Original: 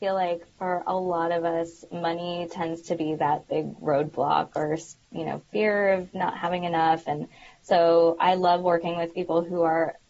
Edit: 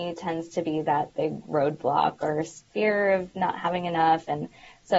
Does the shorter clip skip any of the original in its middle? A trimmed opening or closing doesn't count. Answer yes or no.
yes